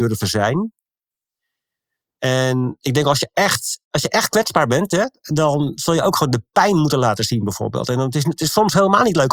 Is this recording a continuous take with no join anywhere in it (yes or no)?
yes